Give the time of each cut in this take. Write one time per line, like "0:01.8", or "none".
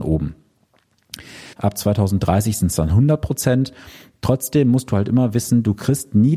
0:01.5